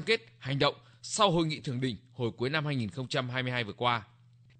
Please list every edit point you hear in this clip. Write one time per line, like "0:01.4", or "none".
none